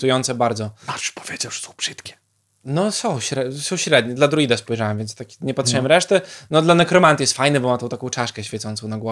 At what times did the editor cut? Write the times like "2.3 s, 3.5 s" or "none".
none